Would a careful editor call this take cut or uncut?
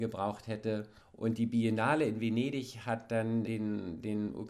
cut